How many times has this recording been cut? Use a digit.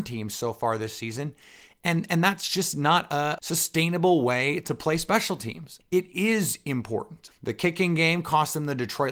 3